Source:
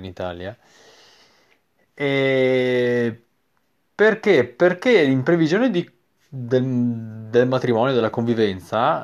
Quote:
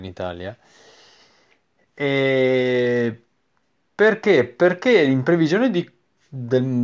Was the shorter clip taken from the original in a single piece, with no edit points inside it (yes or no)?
yes